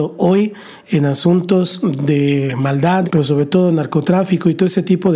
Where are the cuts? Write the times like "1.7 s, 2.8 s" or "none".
3.0 s